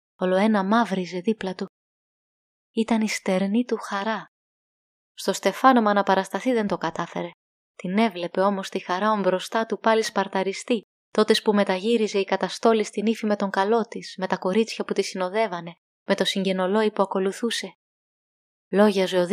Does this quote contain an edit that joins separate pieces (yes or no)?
yes